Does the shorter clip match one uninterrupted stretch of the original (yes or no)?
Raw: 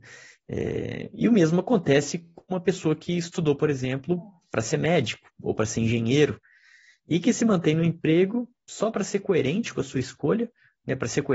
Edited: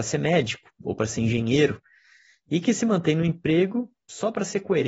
yes